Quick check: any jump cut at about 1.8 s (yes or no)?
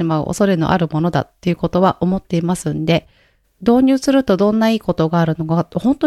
no